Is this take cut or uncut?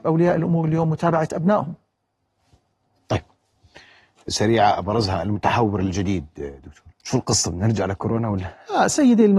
cut